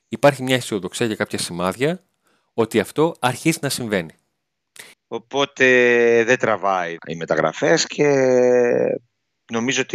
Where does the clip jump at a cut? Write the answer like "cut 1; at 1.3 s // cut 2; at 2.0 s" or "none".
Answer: cut 1; at 4.9 s // cut 2; at 7.0 s